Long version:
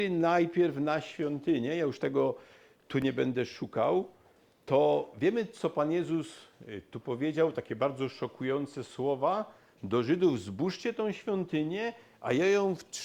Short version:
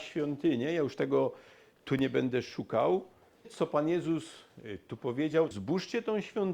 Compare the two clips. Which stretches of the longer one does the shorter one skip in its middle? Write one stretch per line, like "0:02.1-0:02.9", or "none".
0:04.5-0:05.5
0:07.5-0:10.4

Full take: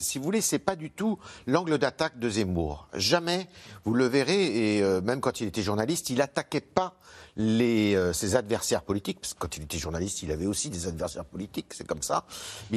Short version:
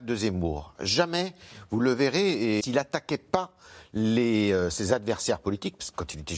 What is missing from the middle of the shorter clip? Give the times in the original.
0:04.7-0:06.0

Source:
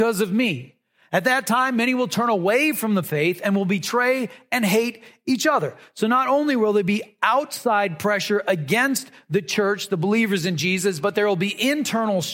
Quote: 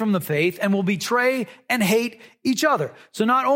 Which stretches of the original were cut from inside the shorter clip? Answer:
none

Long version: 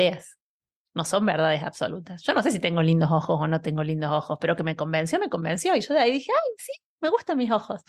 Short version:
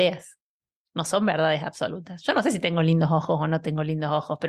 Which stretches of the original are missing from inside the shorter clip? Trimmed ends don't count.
none

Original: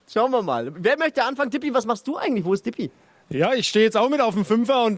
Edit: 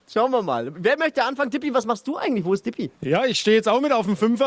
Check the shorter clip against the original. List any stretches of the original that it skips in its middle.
0:02.9-0:03.2

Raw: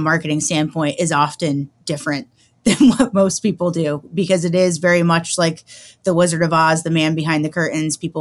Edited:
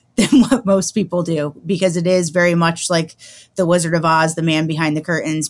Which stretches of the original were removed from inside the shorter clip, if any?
none

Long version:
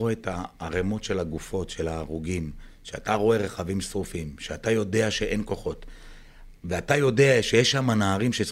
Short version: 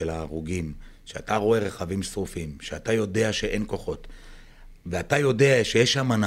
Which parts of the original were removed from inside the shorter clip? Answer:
none

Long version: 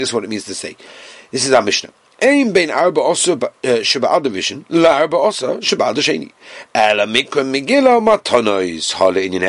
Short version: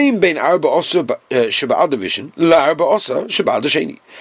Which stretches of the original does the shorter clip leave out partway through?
none

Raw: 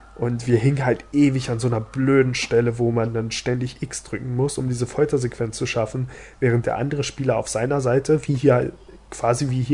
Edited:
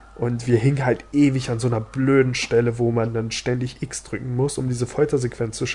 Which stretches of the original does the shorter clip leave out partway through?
none

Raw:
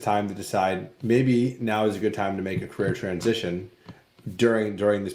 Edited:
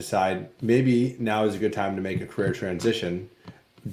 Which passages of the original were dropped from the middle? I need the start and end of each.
none

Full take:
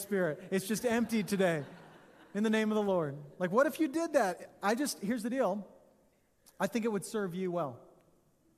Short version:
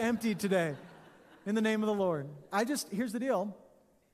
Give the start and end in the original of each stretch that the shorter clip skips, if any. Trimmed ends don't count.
0:03.3-0:04.6

